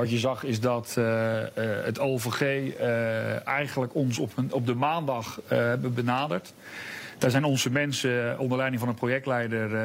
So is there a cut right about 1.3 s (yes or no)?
no